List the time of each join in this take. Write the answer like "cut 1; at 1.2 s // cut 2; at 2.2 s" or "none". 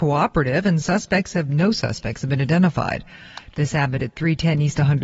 cut 1; at 3.5 s